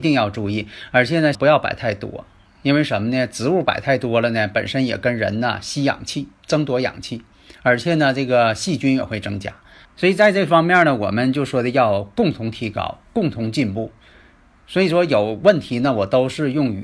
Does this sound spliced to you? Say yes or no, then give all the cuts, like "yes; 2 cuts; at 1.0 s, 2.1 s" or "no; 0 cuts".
yes; 2 cuts; at 1.3 s, 9.8 s